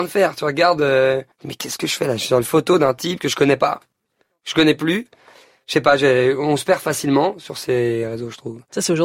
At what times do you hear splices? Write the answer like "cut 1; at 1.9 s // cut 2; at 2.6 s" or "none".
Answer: cut 1; at 1.3 s